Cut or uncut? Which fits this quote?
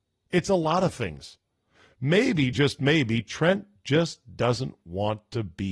uncut